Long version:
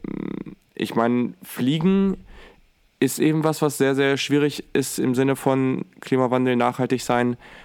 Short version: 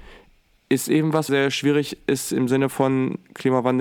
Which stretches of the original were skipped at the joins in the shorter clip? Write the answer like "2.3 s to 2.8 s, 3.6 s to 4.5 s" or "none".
3.6 s to 4.0 s